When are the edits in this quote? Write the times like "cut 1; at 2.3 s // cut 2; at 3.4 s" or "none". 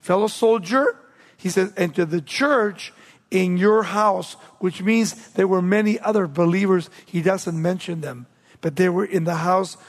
none